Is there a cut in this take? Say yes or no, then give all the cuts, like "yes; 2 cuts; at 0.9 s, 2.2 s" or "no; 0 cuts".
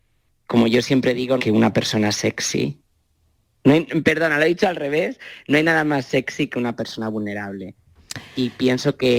yes; 1 cut; at 1.4 s